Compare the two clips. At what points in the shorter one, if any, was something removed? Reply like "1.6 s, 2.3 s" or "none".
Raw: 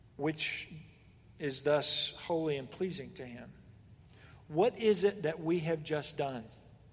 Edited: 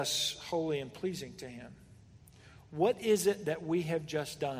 none